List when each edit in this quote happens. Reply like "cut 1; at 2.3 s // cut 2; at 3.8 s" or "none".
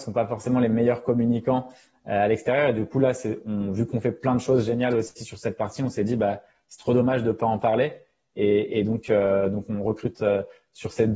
none